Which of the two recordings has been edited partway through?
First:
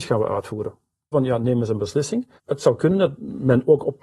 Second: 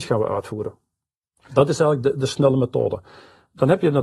first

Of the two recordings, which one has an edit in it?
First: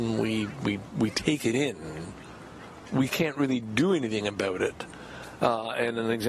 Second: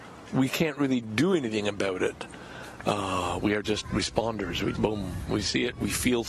second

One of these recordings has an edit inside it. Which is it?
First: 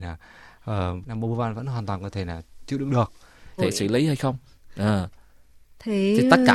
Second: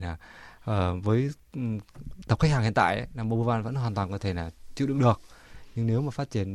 first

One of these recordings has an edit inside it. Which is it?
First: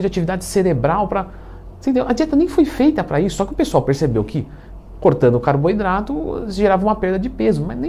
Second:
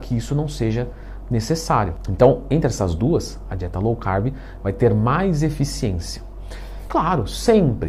second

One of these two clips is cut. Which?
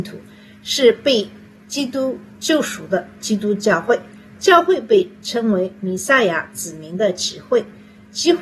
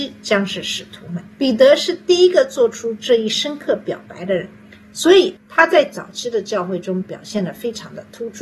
second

